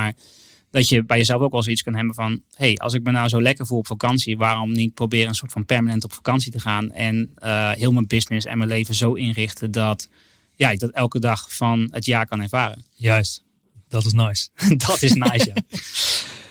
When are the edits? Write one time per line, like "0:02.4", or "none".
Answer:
none